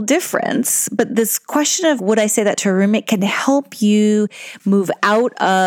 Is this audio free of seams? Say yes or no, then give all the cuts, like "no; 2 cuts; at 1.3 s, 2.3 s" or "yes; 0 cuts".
no; 1 cut; at 2.0 s